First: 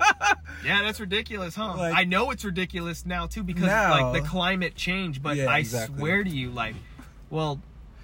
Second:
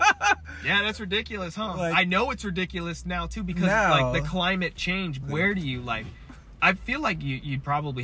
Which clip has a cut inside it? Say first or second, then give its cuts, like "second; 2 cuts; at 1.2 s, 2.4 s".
second; 2 cuts; at 5.2 s, 6.6 s